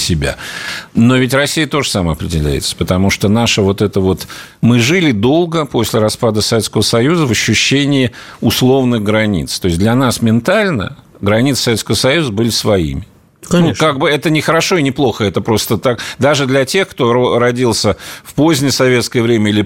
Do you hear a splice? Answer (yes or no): no